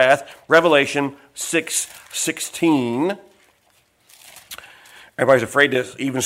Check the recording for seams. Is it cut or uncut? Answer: uncut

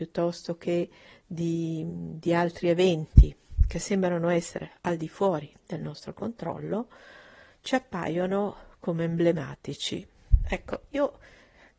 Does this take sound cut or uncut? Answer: uncut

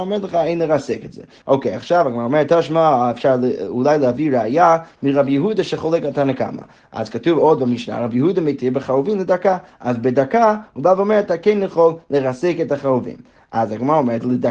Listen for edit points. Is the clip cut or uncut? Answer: cut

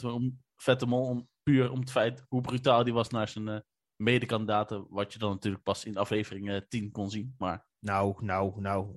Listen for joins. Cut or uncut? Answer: uncut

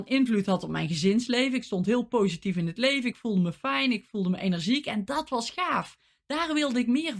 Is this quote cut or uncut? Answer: uncut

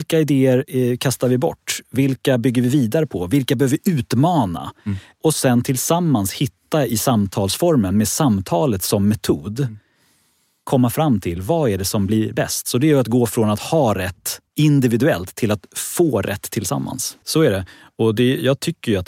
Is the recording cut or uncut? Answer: cut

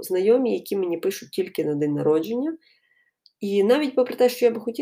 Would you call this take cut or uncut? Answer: uncut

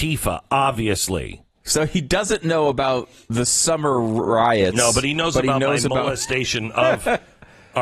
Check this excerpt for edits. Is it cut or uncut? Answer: cut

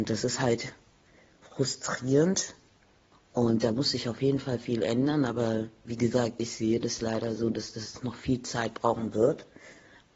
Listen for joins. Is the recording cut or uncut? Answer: uncut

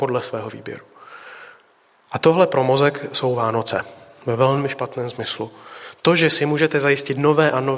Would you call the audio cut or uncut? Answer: uncut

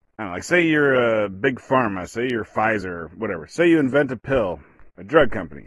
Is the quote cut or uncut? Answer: uncut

